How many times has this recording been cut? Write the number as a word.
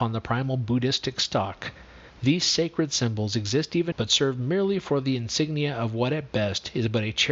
one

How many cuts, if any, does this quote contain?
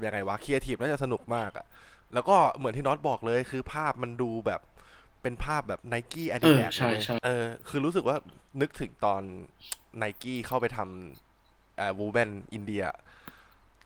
zero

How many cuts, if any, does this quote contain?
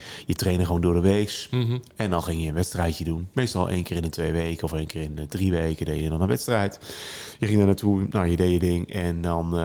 zero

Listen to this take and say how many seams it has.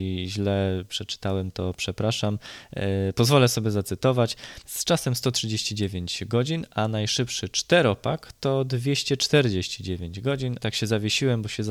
two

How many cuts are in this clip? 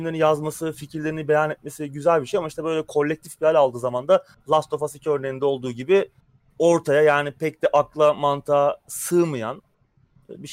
zero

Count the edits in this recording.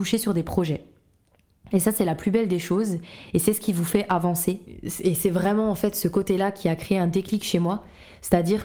zero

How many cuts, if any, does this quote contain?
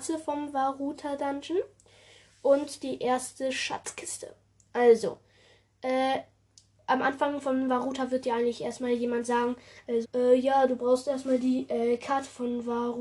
one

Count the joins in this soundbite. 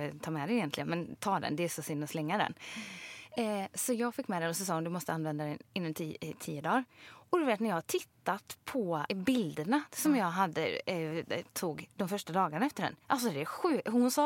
one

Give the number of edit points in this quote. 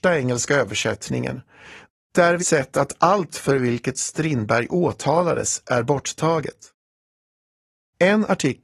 one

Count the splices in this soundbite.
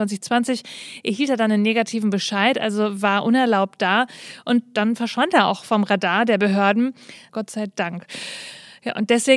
one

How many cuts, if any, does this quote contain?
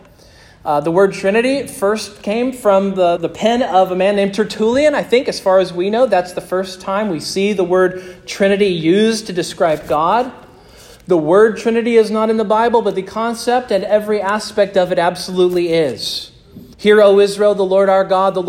two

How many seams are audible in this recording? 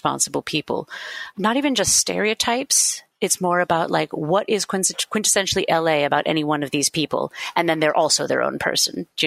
one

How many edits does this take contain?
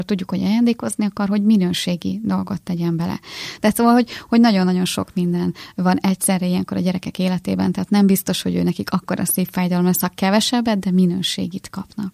one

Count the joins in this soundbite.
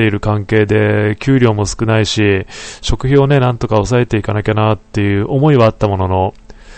zero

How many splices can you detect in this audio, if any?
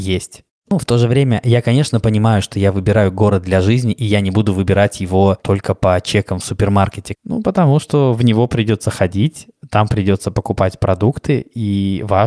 one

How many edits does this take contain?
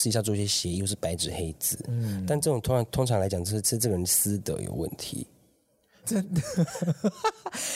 one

